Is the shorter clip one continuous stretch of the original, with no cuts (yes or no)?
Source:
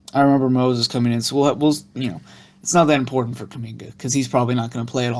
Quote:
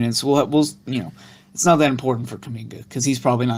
yes